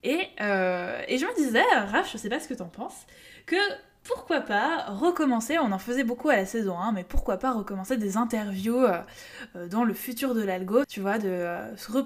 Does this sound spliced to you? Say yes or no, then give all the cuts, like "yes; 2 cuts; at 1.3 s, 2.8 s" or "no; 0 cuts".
yes; 1 cut; at 10.8 s